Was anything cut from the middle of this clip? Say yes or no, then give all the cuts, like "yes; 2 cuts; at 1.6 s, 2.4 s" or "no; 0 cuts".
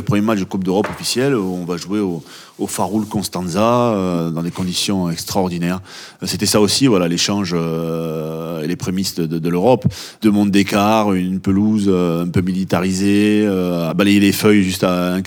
no; 0 cuts